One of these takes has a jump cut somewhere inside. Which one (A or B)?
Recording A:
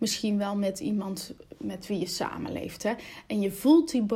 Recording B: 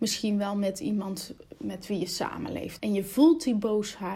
B